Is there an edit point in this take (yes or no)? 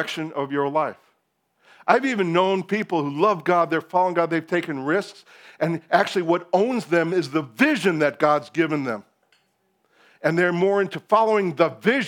no